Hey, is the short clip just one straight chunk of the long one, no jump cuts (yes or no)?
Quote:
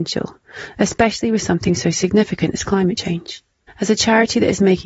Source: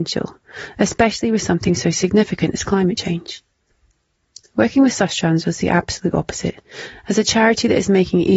no